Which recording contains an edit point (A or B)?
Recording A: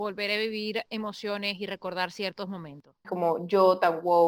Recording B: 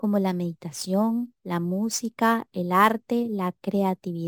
A